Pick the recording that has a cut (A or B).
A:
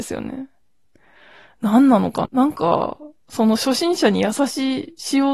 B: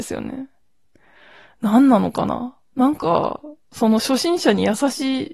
A